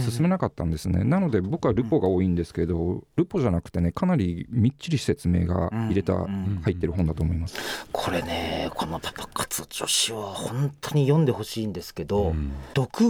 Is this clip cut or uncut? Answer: uncut